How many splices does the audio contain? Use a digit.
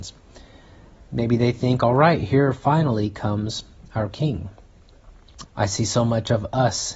2